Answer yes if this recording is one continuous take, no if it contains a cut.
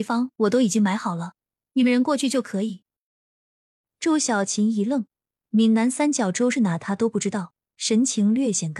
yes